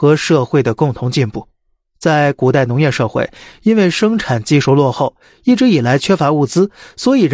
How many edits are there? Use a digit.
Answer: 1